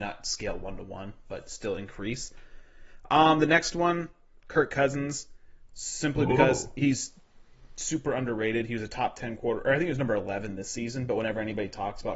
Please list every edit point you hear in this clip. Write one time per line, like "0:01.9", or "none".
none